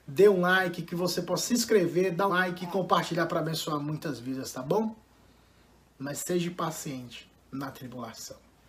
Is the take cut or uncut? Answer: cut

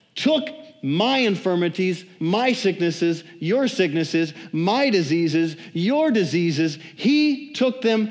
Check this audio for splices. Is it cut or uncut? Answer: cut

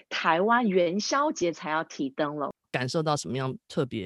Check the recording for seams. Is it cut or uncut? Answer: cut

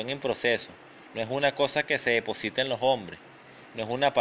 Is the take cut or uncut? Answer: uncut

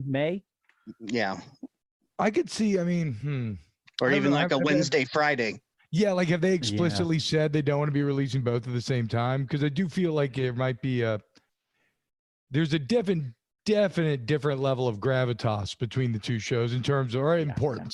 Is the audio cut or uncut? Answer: uncut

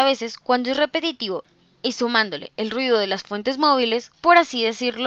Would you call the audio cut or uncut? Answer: cut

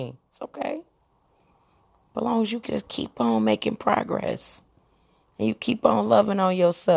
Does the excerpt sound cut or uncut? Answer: uncut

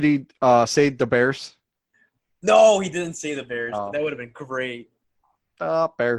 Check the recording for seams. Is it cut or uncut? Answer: uncut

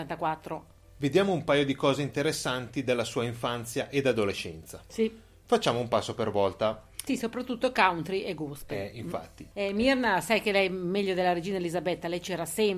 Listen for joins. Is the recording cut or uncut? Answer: cut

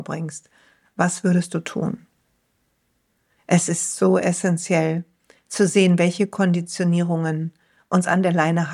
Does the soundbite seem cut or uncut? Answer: uncut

